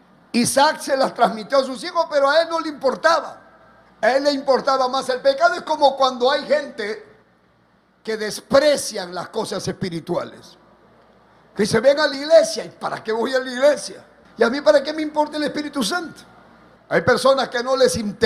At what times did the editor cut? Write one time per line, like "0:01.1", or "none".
0:14.3
0:16.8